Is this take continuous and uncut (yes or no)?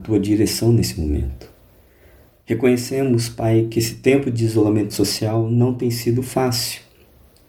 yes